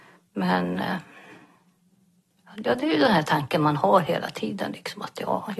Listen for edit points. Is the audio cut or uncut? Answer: uncut